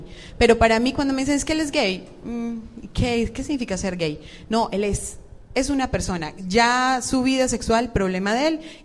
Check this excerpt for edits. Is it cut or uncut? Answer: uncut